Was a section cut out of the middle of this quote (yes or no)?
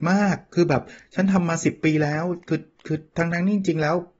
no